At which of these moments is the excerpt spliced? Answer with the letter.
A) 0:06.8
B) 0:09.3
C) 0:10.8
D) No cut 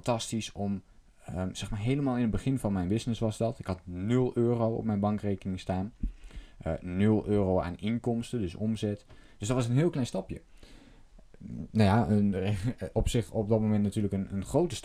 B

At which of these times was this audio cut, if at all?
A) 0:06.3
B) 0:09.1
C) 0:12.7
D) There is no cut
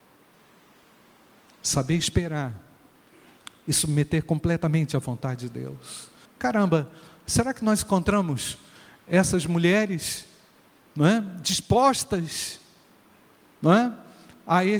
A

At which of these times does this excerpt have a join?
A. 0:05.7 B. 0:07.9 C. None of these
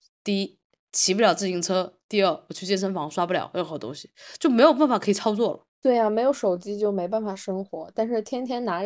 A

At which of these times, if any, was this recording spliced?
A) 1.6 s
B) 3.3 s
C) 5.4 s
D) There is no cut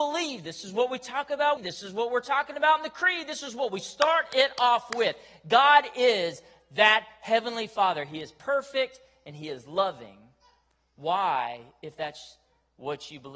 A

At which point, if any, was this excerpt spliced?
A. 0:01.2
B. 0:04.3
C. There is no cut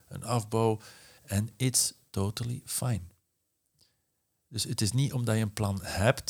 A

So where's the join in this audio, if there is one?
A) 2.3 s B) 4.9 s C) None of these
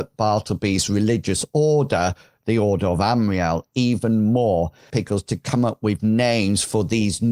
B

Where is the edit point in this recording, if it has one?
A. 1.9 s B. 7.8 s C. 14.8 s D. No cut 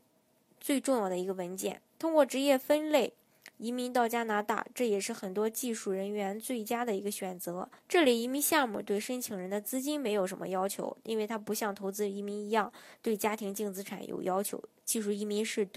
B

